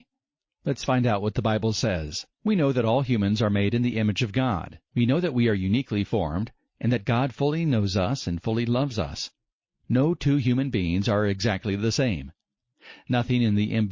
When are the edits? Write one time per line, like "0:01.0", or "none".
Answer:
0:02.3